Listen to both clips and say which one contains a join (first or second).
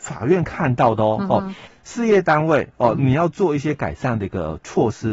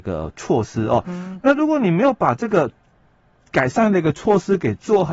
first